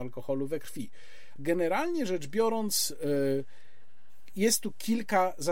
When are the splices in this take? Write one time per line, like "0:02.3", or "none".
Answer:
0:01.4